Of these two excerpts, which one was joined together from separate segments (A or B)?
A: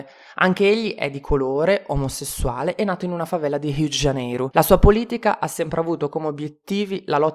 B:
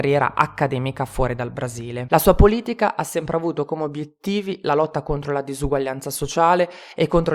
B